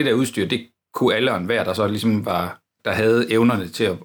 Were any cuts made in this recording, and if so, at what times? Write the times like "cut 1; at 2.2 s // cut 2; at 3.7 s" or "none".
cut 1; at 2.8 s